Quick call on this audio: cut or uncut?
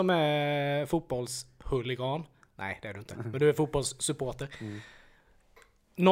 uncut